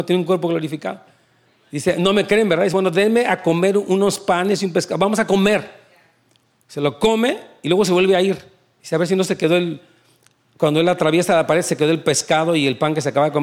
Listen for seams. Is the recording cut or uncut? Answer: uncut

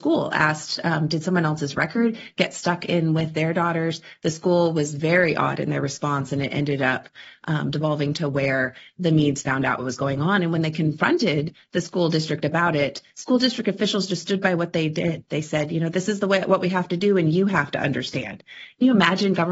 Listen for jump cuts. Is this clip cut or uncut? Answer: uncut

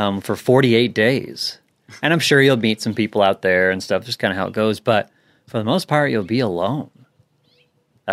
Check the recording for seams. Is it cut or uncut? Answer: uncut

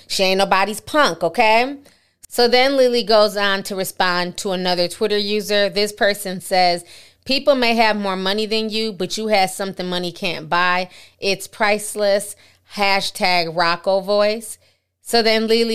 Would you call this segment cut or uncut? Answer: uncut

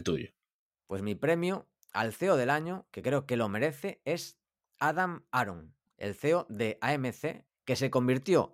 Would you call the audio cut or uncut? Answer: cut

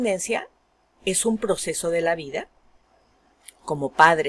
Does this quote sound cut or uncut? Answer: uncut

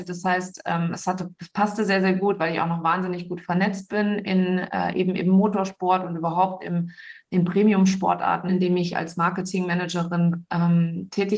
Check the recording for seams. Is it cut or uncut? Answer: cut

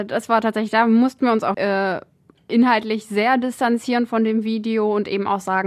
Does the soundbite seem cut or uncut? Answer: cut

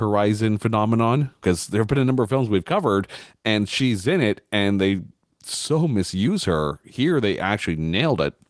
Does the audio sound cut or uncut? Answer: cut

